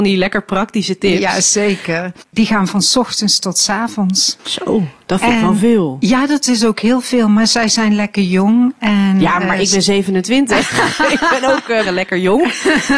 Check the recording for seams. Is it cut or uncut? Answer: cut